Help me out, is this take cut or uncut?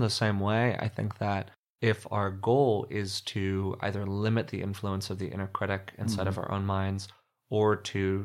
uncut